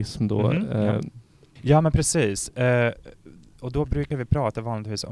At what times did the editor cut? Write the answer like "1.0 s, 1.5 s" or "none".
1.6 s